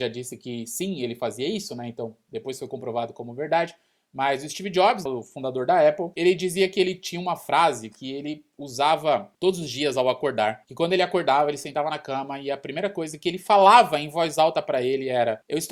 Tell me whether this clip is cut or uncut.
cut